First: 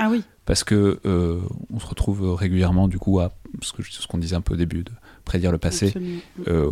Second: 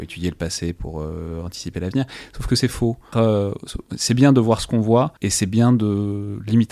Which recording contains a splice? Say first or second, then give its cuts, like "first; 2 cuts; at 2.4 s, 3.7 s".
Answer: second; 2 cuts; at 3.1 s, 5.2 s